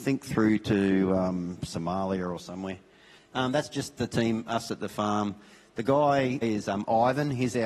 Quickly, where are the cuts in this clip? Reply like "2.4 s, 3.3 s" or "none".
3.2 s, 6.4 s